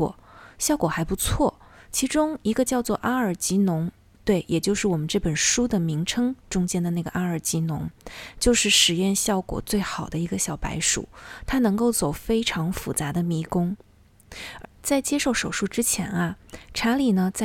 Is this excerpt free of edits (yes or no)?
no